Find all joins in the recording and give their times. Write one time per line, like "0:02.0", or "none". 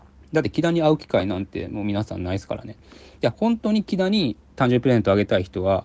none